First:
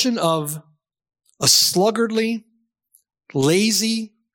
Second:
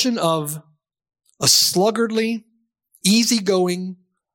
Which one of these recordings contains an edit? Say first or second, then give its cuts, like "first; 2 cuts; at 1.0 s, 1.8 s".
second; 1 cut; at 3.0 s